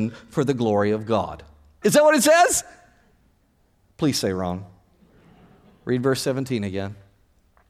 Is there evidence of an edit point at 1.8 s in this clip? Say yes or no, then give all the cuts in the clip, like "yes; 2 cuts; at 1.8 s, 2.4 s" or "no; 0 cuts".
yes; 1 cut; at 1.8 s